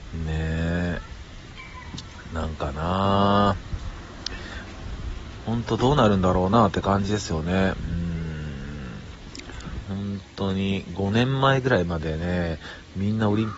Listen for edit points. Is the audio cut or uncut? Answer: cut